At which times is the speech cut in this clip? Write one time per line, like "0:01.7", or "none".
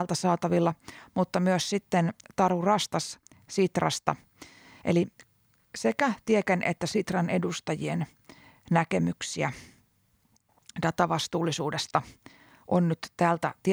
0:04.8

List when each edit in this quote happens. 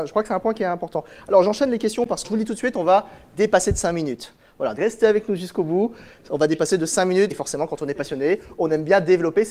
0:02.2
0:04.8
0:07.3

